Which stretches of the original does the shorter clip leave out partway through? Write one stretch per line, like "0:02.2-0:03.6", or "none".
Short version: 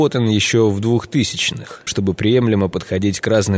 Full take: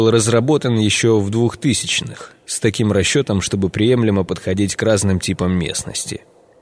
0:02.4-0:03.4